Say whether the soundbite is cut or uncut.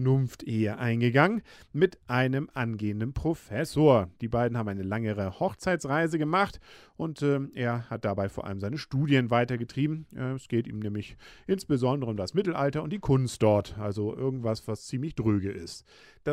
uncut